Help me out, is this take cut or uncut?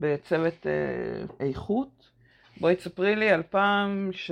uncut